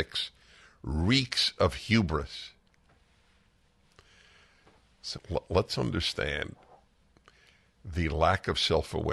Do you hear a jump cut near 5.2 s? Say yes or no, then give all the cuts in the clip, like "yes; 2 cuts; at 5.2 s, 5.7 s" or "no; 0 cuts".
yes; 1 cut; at 5.2 s